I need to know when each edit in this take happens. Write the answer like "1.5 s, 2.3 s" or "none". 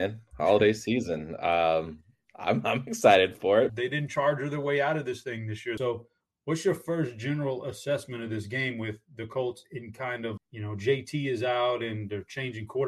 3.7 s, 5.8 s, 10.4 s

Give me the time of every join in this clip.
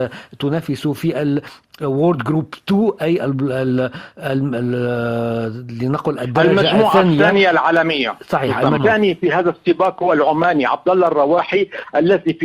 8.8 s

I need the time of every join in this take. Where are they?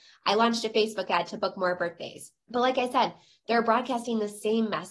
2.4 s

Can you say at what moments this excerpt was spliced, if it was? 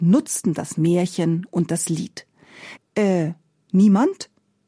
2.8 s

